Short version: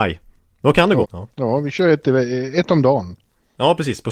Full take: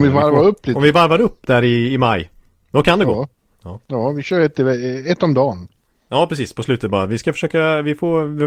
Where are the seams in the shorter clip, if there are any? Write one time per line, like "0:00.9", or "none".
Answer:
0:01.0